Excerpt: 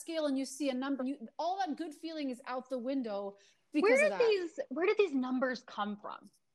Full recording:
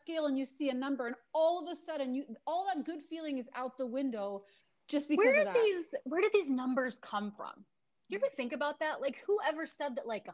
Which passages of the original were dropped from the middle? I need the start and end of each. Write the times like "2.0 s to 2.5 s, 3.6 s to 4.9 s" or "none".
1.0 s to 2.1 s, 4.8 s to 5.1 s